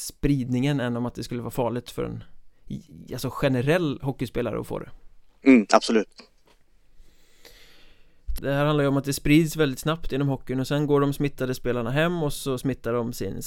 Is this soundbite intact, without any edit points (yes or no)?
no